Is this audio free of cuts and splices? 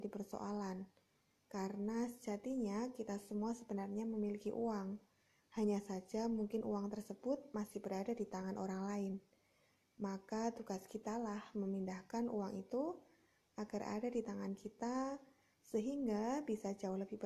yes; 0 cuts

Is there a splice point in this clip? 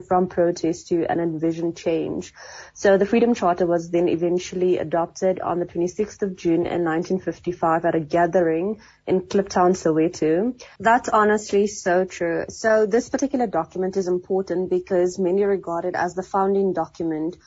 yes; 1 cut; at 10.8 s

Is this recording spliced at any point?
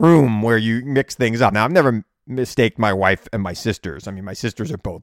no; 0 cuts

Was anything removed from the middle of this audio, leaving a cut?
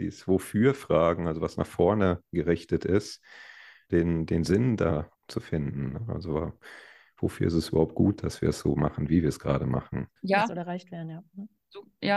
yes; 3 cuts; at 3.9 s, 5.1 s, 10.2 s

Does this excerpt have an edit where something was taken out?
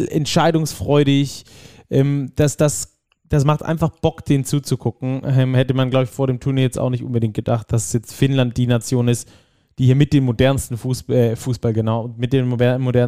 no; 0 cuts

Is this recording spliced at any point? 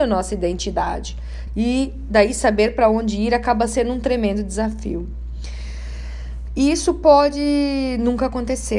yes; 2 cuts; at 1.5 s, 6.5 s

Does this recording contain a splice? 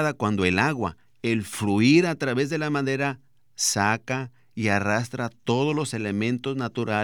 yes; 1 cut; at 3.4 s

